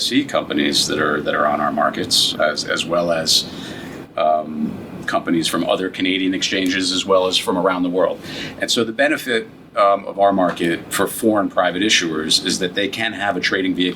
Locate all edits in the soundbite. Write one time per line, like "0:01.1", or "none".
0:02.3